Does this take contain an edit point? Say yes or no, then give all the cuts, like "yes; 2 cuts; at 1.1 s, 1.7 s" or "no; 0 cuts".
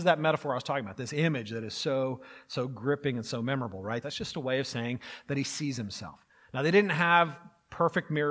yes; 1 cut; at 4.0 s